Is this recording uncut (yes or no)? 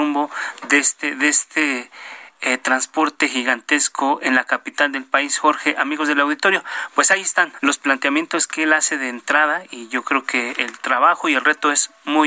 no